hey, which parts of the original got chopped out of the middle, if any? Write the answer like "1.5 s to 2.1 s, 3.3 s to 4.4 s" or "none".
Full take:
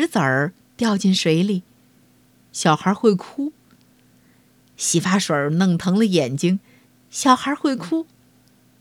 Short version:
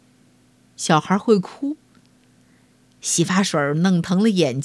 none